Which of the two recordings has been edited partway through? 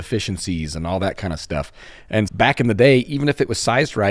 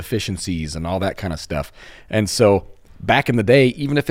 first; 1 cut; at 2.3 s

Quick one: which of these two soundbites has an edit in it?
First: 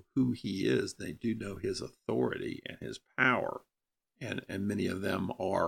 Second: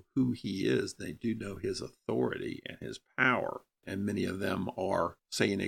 second; 1 cut; at 3.8 s

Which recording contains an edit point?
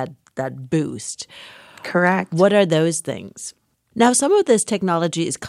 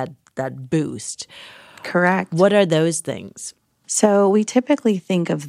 first; 1 cut; at 3.7 s

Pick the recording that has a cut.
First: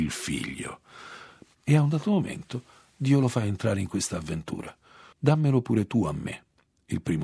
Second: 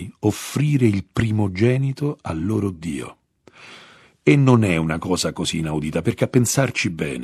first; 1 cut; at 1.5 s

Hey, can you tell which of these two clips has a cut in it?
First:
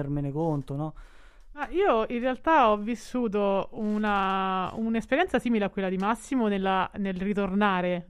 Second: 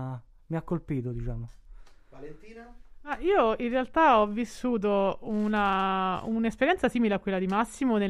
first; 1 cut; at 1.5 s

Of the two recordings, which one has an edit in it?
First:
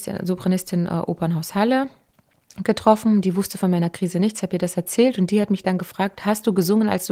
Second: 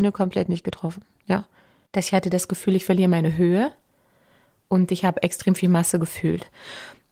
second; 1 cut; at 1.9 s

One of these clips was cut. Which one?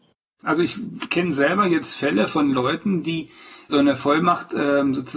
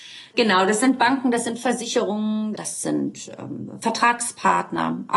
second; 1 cut; at 2.5 s

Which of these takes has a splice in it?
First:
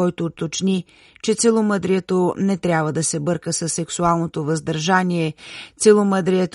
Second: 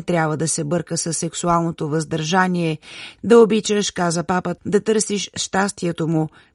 second; 2 cuts; at 3.2 s, 4.6 s

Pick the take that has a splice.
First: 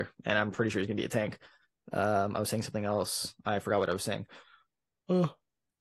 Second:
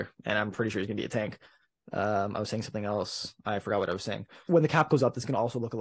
second; 1 cut; at 4.5 s

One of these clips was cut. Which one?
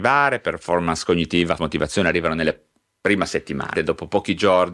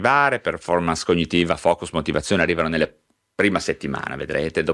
first; 2 cuts; at 1.6 s, 3.8 s

